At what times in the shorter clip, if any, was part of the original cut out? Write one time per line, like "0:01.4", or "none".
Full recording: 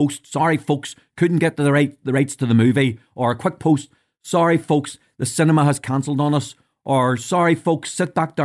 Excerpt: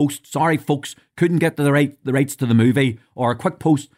none